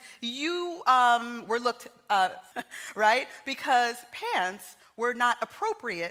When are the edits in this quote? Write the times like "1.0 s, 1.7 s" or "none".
2.5 s